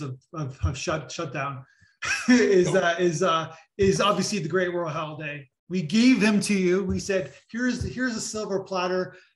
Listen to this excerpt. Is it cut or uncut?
cut